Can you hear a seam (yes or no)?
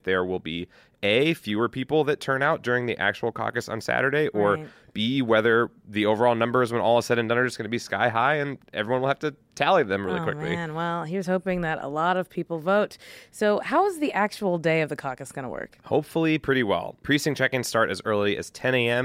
no